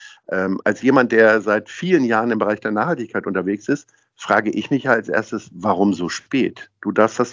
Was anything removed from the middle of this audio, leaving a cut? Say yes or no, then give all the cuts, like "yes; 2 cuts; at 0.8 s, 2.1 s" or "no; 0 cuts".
no; 0 cuts